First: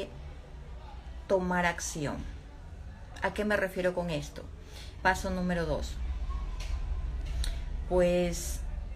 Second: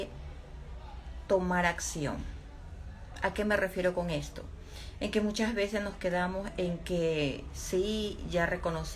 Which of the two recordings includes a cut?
first; 1 cut; at 5.0 s

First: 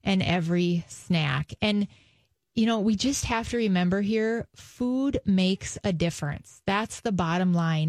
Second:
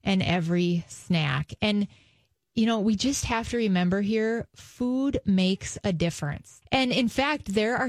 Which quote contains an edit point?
second; 1 cut; at 6.6 s

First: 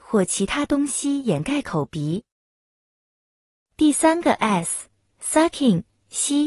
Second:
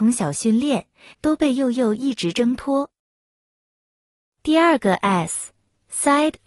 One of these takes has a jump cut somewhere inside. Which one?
second; 1 cut; at 1.1 s

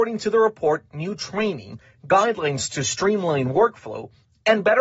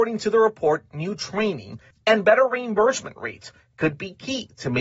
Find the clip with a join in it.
second; 1 cut; at 1.9 s

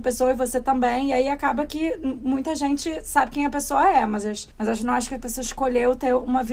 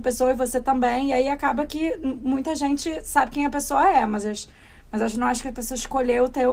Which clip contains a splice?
first; 1 cut; at 4.5 s

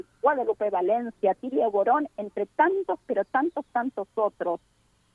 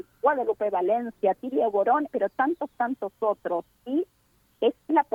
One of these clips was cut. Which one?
second; 2 cuts; at 2.1 s, 3.7 s

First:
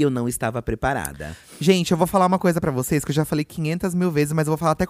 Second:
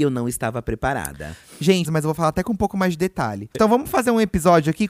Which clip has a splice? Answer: second; 2 cuts; at 1.8 s, 3.5 s

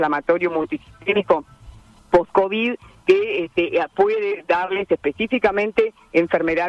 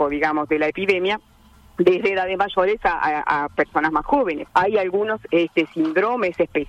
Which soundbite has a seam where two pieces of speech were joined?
second; 1 cut; at 4.5 s

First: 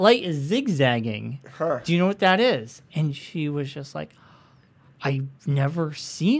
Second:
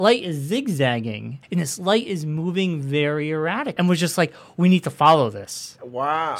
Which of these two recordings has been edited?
second; 2 cuts; at 1.4 s, 3.8 s

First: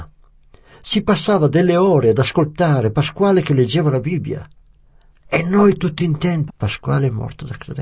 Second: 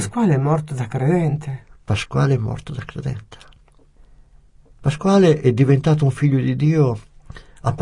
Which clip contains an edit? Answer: first; 1 cut; at 6.5 s

